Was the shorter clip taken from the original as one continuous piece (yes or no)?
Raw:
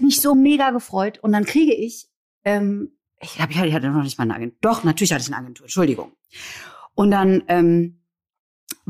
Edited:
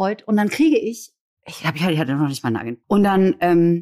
no